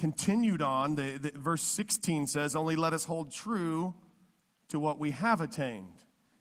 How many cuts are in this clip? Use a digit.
0